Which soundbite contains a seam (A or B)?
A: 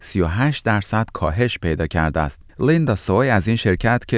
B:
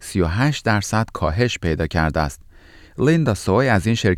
A